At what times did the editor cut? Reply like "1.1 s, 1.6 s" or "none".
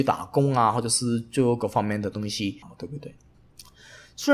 2.6 s

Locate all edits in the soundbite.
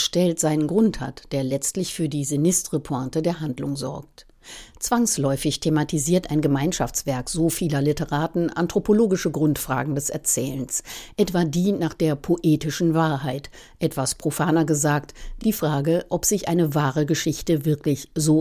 none

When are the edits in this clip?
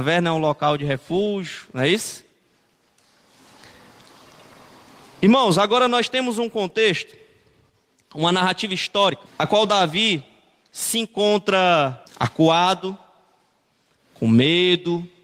9.3 s, 12.1 s

